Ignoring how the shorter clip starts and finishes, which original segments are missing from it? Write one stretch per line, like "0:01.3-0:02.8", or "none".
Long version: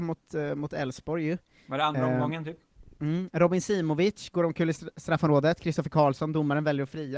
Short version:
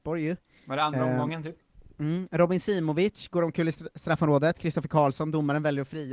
none